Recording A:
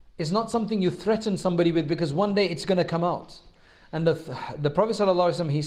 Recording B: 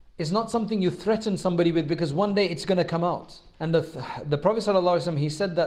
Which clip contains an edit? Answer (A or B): B